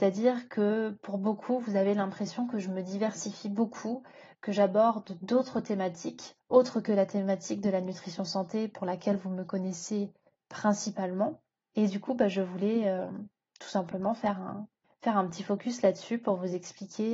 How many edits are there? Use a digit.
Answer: 0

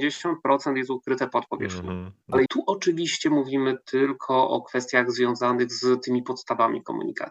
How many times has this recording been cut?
1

